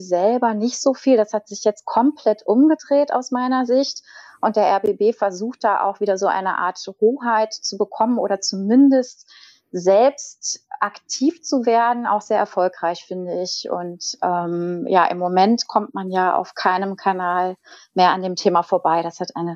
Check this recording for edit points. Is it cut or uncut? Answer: uncut